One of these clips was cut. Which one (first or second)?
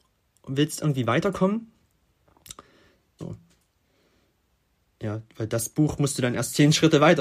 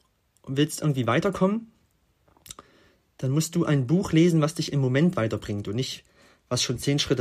first